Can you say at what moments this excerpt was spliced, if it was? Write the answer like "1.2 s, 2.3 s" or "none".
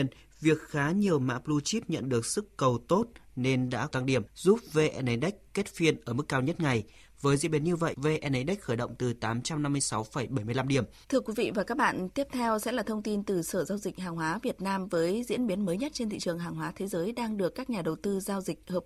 7.9 s, 11.0 s